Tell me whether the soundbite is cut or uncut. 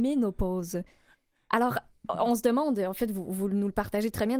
uncut